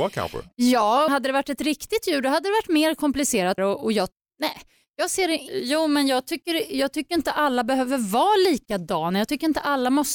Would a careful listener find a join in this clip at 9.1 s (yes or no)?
no